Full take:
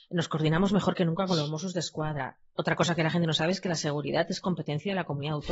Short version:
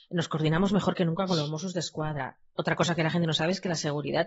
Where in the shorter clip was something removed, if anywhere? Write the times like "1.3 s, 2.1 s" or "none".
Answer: none